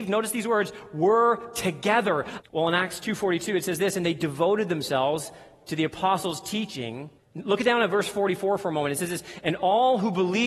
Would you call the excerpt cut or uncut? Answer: cut